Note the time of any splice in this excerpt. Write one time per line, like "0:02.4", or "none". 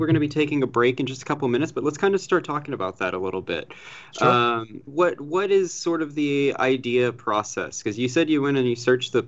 0:04.9